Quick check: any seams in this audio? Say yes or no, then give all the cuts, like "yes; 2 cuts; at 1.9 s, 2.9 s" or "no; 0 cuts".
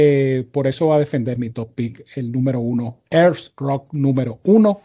yes; 1 cut; at 1.4 s